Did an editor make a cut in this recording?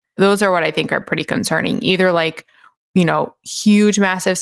no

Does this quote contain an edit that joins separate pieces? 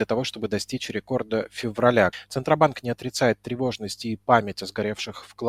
no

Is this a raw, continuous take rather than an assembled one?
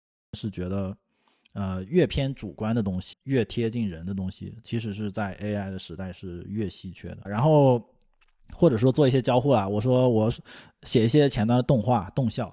no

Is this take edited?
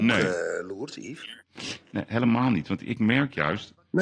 no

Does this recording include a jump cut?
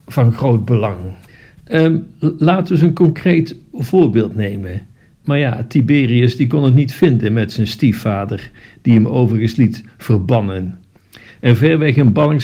yes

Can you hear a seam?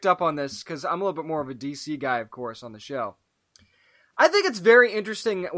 no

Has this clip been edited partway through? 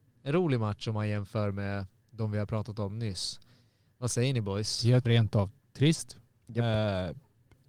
yes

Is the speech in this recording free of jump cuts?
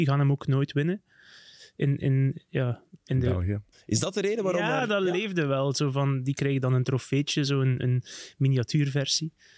no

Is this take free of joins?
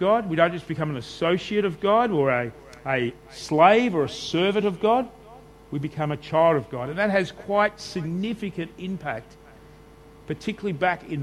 yes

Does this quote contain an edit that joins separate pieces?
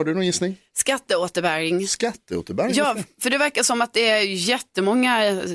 no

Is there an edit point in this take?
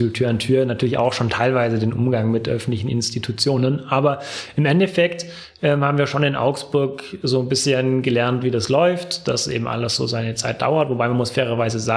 no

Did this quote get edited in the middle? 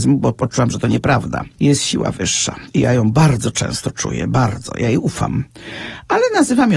no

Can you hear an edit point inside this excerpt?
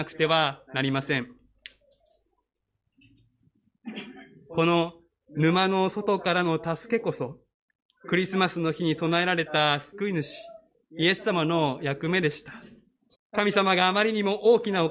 yes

